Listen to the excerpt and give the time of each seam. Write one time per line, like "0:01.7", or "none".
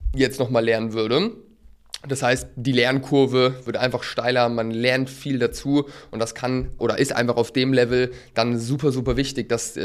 0:06.8